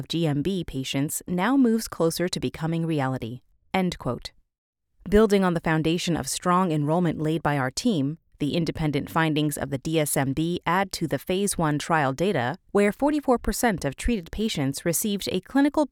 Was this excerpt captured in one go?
no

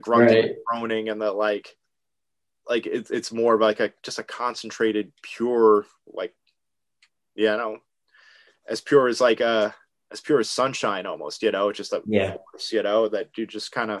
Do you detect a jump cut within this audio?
no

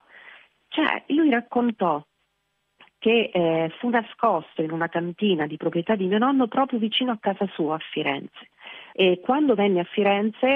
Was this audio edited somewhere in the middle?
yes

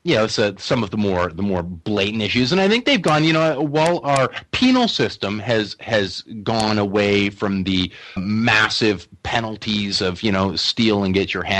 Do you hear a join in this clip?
yes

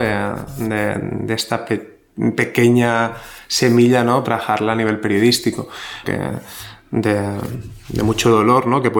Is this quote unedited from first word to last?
no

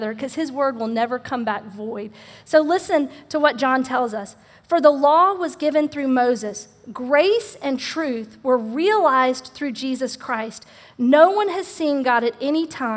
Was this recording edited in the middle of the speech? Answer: no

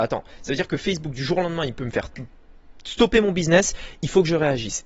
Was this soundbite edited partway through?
no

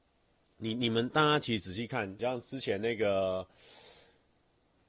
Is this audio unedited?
no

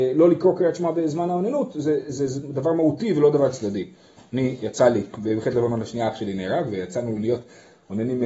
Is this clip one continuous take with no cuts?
yes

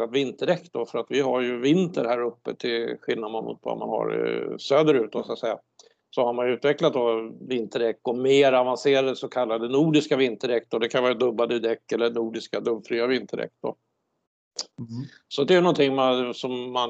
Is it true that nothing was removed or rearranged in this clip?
yes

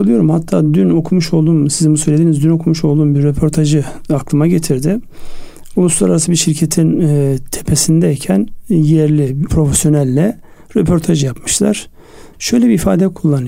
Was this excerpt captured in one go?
no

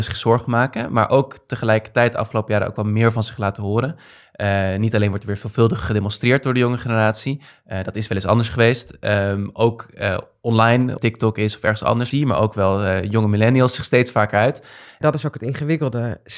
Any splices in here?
yes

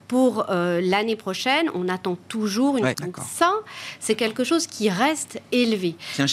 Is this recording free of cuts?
no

